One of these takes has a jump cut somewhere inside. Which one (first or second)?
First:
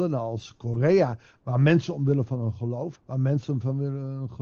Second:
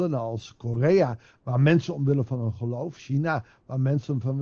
first